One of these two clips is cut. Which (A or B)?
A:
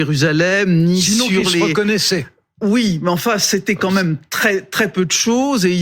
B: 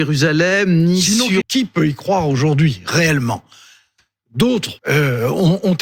B